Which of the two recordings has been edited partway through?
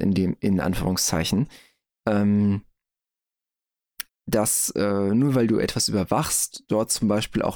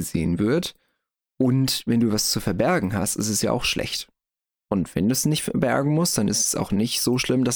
first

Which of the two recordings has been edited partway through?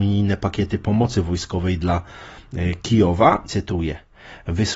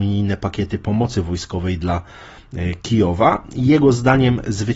first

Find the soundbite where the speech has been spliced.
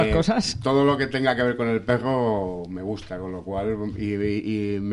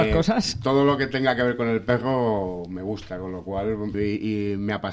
second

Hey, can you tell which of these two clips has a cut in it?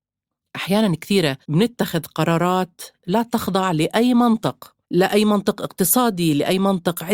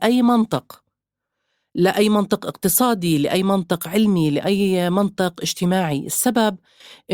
first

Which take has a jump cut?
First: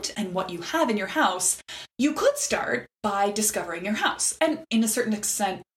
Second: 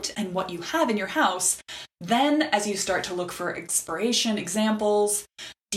first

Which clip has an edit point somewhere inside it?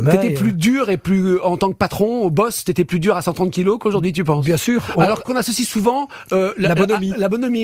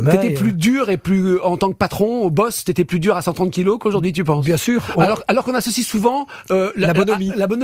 first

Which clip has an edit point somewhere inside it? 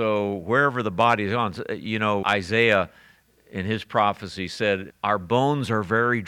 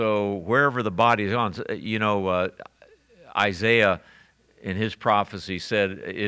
first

